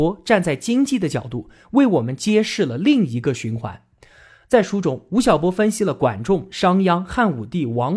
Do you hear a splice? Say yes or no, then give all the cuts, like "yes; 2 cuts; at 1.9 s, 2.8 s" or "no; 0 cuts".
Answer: no; 0 cuts